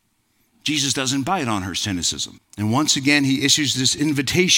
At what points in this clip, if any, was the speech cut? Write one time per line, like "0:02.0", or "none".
0:02.3